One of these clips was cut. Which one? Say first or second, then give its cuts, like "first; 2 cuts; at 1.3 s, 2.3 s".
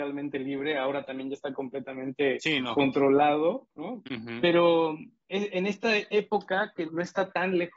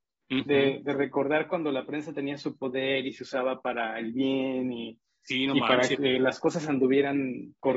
first; 2 cuts; at 4.0 s, 6.9 s